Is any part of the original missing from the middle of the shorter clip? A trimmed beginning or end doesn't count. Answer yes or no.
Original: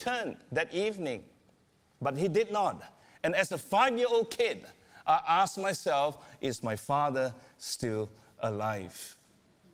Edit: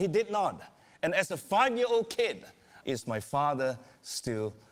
yes